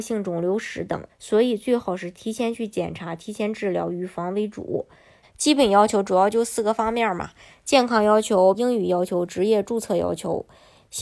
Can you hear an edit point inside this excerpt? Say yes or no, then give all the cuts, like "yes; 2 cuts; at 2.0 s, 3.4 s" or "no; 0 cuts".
yes; 3 cuts; at 1.1 s, 5.2 s, 8.5 s